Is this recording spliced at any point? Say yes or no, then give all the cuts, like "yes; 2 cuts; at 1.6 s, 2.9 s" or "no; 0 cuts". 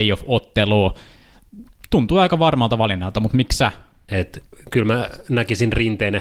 yes; 1 cut; at 4.1 s